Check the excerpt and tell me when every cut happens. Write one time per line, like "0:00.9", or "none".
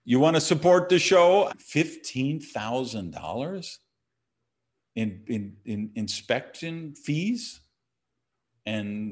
0:01.5

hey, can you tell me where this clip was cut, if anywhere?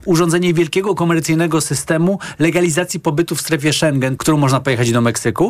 0:04.2

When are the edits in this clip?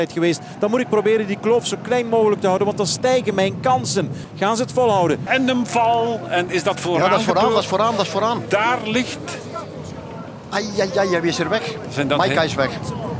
0:05.3

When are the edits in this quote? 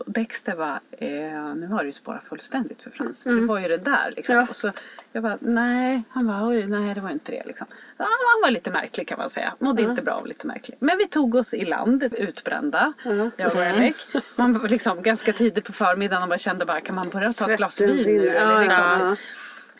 0:12.1

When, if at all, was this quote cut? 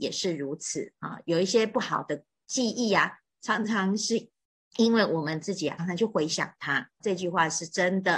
0:05.8
0:07.0

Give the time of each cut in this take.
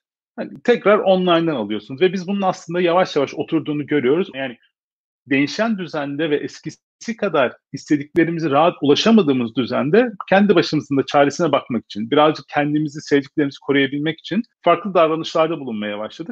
0:04.3
0:14.5

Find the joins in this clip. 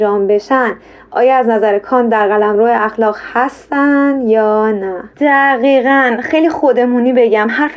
0:05.1

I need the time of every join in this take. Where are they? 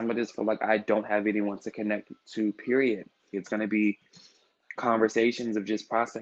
0:03.3

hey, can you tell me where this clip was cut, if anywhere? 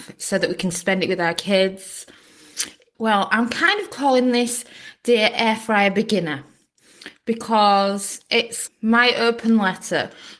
0:02.9
0:08.7

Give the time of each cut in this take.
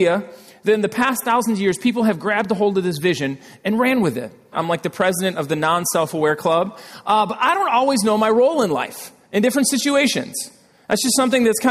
0:04.5

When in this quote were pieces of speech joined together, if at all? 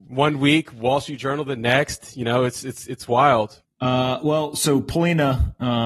0:03.6

